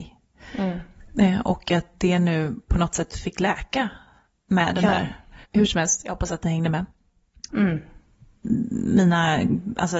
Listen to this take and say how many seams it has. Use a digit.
2